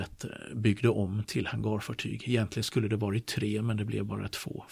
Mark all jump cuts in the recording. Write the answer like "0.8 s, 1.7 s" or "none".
1.3 s